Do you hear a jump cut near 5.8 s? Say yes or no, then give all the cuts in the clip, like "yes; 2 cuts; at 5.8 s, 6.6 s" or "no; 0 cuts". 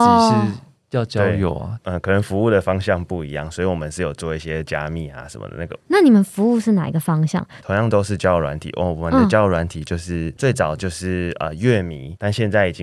no; 1 cut; at 7.6 s